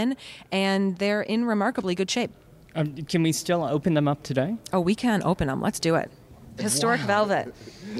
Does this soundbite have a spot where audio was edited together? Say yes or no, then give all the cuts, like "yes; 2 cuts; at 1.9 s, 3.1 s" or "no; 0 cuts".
yes; 1 cut; at 6.6 s